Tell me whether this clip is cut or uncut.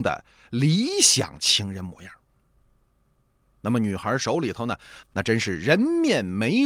cut